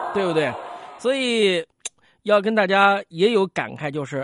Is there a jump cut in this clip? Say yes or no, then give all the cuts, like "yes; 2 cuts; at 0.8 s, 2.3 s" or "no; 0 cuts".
no; 0 cuts